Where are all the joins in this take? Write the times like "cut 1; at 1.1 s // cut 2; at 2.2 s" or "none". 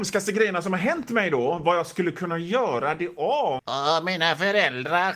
cut 1; at 3.6 s